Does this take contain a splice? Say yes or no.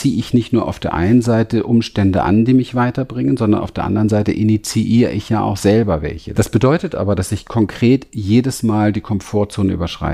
yes